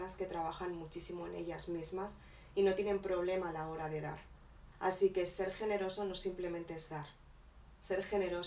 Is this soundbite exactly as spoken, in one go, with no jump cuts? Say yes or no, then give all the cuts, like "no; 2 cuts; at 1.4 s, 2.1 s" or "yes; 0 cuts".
no; 1 cut; at 4.7 s